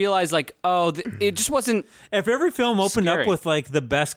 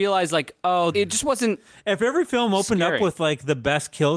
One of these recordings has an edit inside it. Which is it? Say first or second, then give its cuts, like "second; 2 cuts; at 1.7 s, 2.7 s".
second; 1 cut; at 0.9 s